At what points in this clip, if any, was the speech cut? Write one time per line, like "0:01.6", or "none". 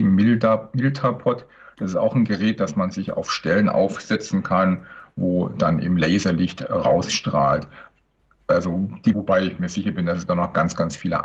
0:09.1